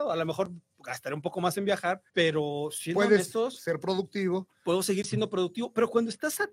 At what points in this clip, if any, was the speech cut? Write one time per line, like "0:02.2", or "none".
0:02.1